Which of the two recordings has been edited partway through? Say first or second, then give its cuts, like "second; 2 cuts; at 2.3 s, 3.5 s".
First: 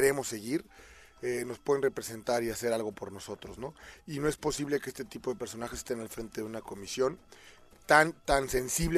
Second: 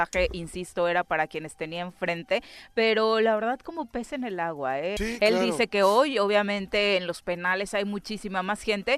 second; 1 cut; at 5.0 s